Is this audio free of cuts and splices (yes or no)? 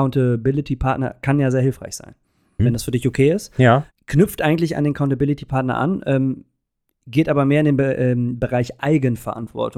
no